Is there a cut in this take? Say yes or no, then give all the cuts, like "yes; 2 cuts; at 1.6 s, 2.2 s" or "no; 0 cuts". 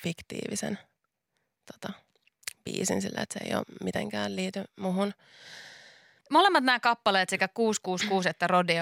yes; 1 cut; at 6.2 s